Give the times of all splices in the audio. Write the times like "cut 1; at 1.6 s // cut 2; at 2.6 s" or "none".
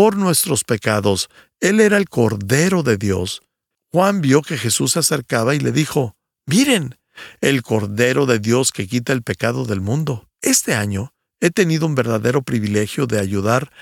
cut 1; at 3.7 s // cut 2; at 10.3 s